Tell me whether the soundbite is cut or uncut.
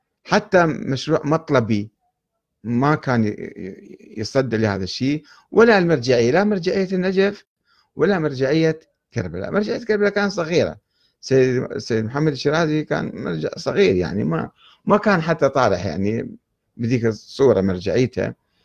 uncut